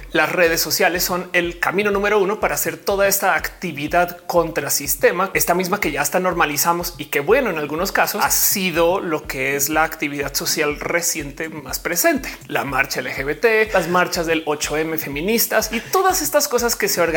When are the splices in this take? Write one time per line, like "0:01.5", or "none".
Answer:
none